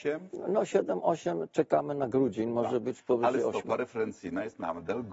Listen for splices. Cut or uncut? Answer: uncut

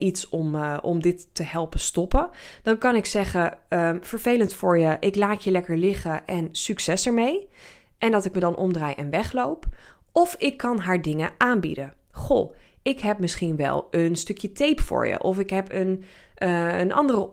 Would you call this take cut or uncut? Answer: uncut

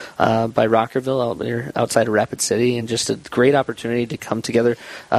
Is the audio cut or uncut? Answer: uncut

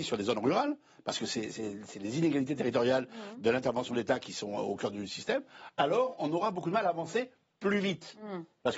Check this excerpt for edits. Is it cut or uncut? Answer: uncut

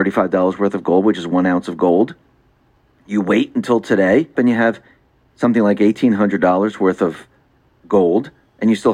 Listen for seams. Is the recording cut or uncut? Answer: cut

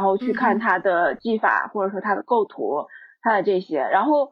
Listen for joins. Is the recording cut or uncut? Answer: uncut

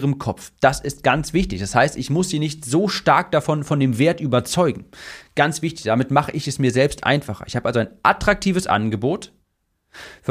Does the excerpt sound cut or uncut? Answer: uncut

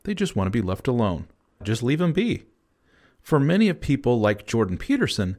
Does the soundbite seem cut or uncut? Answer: cut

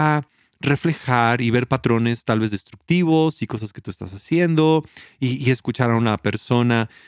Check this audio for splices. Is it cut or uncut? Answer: uncut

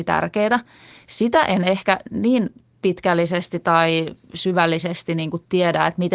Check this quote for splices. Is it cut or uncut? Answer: uncut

